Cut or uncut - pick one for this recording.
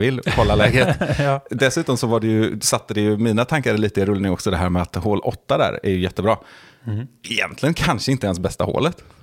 uncut